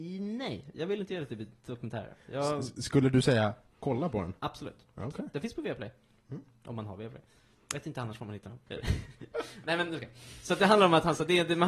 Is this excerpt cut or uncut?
cut